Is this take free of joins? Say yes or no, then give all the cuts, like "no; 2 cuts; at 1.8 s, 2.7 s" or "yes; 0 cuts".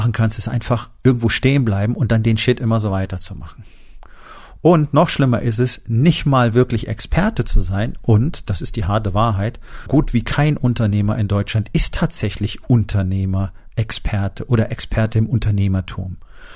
no; 1 cut; at 9.9 s